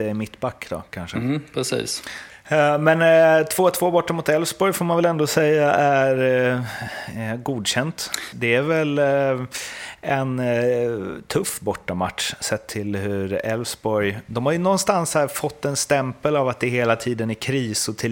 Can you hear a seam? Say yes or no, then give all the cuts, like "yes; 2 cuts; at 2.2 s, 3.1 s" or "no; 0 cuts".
yes; 1 cut; at 8.3 s